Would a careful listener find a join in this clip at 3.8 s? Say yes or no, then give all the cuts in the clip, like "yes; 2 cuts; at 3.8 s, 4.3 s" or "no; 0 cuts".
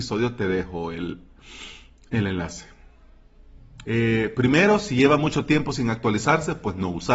yes; 1 cut; at 3.8 s